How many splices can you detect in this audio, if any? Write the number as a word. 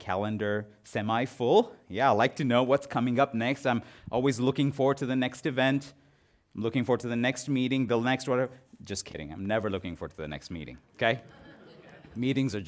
zero